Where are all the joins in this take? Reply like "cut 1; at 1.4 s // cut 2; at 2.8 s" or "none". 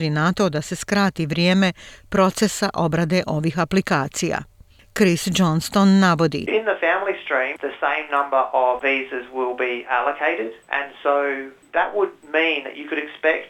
cut 1; at 7.6 s // cut 2; at 8.8 s